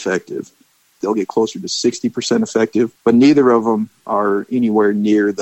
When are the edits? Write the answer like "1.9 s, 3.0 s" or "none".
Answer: 1.0 s, 3.0 s